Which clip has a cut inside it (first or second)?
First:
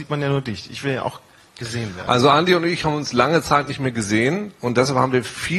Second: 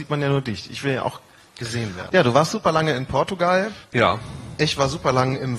second